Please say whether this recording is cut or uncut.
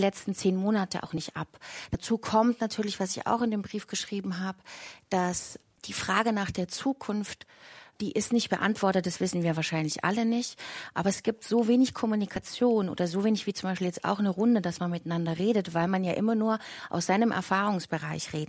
uncut